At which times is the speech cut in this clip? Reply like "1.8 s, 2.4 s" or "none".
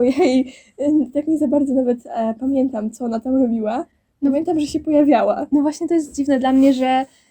none